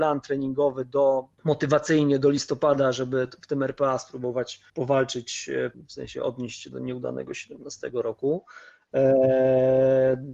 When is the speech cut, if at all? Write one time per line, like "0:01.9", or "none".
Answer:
0:04.7
0:05.7